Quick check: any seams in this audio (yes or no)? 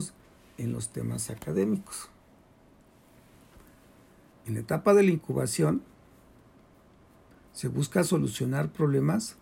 yes